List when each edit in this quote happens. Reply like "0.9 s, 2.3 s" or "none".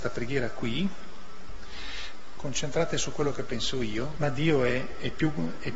2.4 s, 4.2 s